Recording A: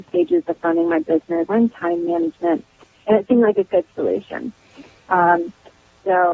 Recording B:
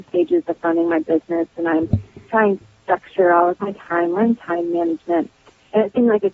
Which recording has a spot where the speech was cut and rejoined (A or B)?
A